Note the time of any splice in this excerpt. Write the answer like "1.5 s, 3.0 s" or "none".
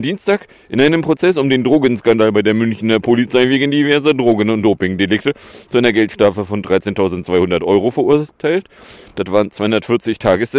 none